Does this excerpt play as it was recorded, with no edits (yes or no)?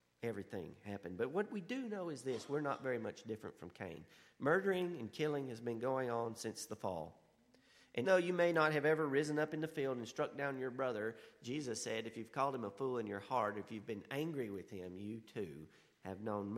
no